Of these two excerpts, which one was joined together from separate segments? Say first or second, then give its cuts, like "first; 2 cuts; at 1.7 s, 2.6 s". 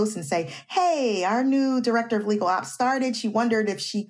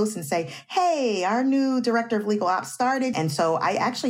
second; 1 cut; at 3.1 s